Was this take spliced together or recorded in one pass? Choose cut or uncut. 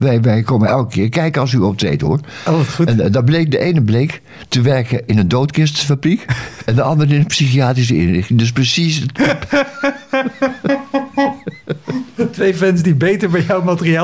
uncut